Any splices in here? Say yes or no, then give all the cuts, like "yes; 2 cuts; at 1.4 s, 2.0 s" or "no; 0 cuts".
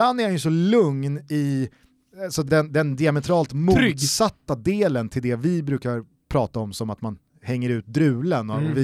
no; 0 cuts